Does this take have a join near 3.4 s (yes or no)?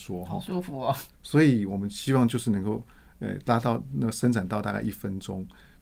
no